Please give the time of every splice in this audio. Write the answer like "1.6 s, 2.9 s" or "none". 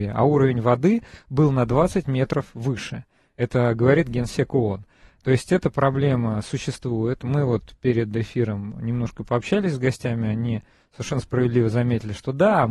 none